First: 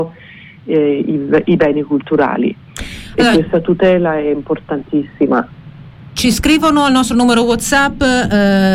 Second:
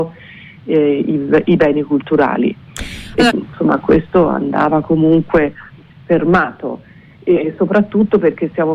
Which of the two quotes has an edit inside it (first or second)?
second